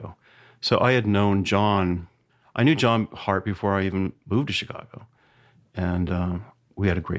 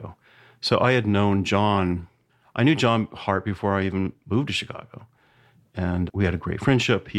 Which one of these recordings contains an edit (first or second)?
second